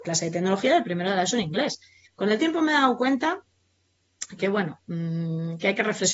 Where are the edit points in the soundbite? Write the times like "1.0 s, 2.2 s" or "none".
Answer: 2.1 s, 4.4 s